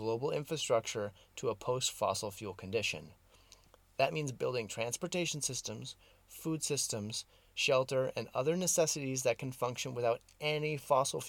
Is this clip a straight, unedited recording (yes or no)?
yes